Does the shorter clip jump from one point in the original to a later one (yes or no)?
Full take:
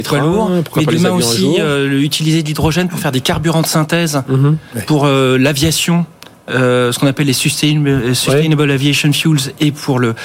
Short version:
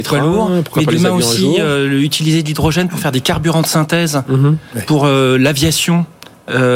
no